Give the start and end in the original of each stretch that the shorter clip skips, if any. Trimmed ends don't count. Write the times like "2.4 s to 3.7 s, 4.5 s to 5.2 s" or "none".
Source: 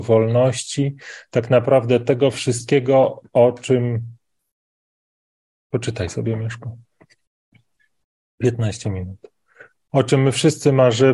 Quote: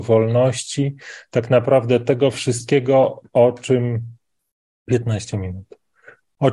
4.8 s to 8.3 s